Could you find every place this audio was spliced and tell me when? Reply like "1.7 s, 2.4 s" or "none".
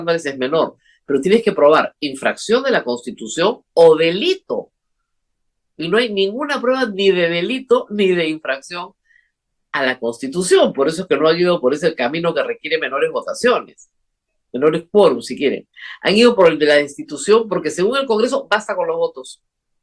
none